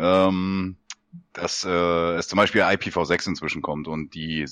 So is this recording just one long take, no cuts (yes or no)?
yes